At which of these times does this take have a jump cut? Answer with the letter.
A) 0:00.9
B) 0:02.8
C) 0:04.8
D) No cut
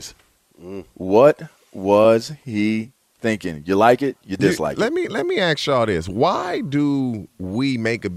D